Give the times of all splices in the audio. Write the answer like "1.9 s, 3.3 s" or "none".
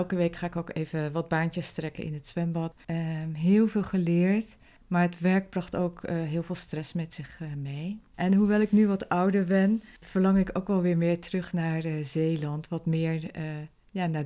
2.8 s, 8.1 s